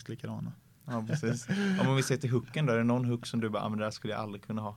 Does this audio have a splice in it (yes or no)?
no